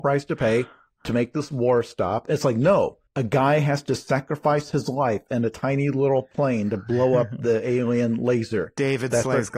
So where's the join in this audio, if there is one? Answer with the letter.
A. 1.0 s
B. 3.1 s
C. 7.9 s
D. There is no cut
B